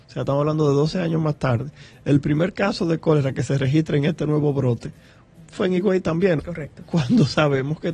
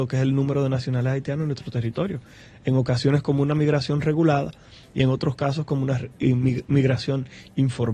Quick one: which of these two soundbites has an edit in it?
first; 1 cut; at 6.4 s

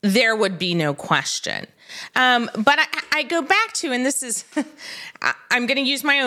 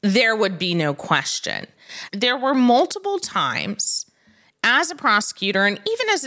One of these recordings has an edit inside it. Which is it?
second; 1 cut; at 2.1 s

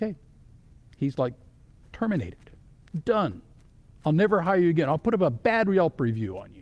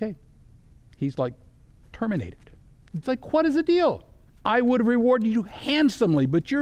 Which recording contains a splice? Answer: second; 2 cuts; at 3.0 s, 4.3 s

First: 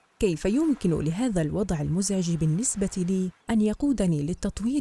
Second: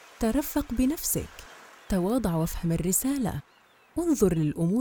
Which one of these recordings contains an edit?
first; 1 cut; at 3.4 s

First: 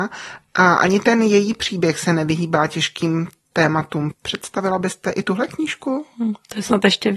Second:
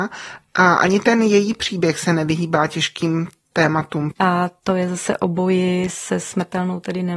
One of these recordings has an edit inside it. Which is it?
second; 1 cut; at 4.2 s

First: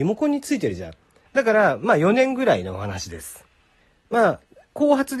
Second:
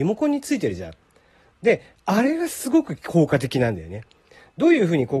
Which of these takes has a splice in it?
first; 1 cut; at 1.3 s

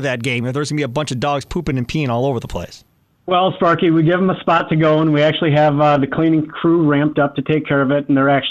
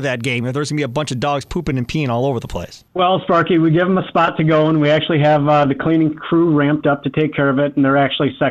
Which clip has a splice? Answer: second; 1 cut; at 2.9 s

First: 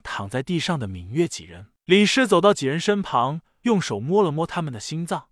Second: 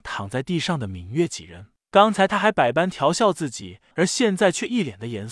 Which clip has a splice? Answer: second; 2 cuts; at 1.8 s, 3.9 s

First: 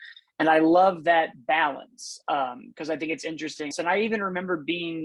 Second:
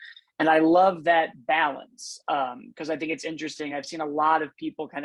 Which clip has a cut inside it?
first; 1 cut; at 3.7 s

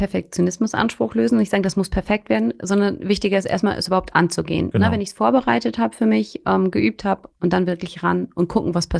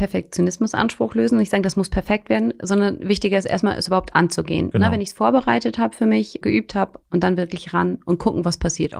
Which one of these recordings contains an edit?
second; 1 cut; at 6.4 s

